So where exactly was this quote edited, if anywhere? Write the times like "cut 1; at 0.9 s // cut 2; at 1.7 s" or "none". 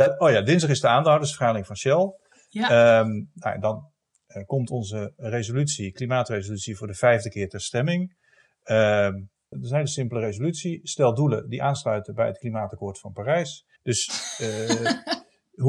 cut 1; at 9.5 s // cut 2; at 13.8 s